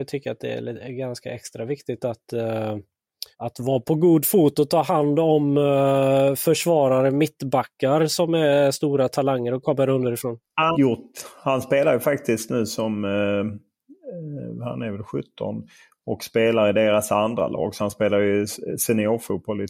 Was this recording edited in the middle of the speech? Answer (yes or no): yes